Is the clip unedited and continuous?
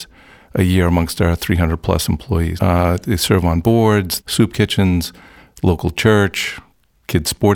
no; 2 cuts; at 2.6 s, 4.2 s

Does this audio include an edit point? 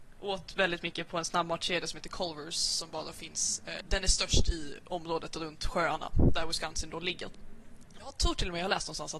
yes; 2 cuts; at 3.8 s, 8.0 s

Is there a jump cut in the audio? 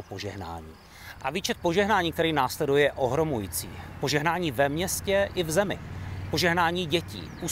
no; 0 cuts

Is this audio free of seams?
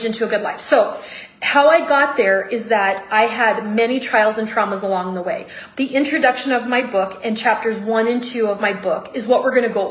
yes; 0 cuts

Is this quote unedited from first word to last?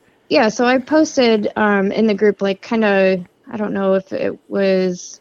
yes; 0 cuts

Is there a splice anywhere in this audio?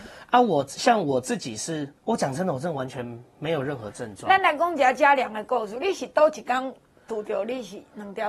yes; 1 cut; at 2.0 s

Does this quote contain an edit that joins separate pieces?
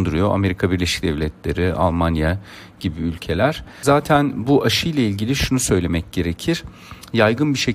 no; 0 cuts

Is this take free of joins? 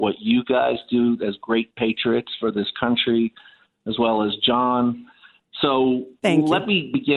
yes; 0 cuts

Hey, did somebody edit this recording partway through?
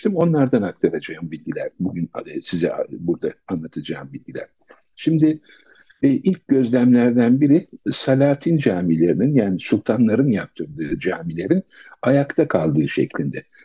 no; 0 cuts

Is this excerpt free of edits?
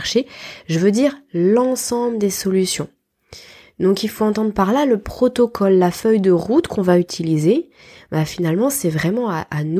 yes; 0 cuts

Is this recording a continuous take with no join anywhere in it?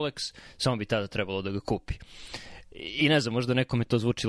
yes; 0 cuts

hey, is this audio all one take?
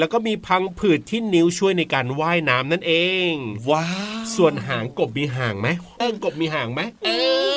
no; 1 cut; at 6.0 s

